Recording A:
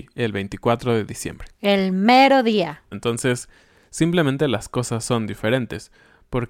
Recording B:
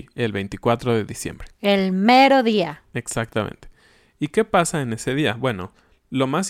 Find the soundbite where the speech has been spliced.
A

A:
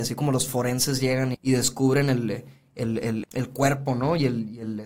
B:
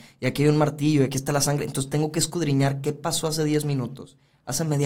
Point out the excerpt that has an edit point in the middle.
A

